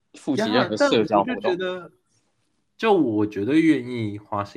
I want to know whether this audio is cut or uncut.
cut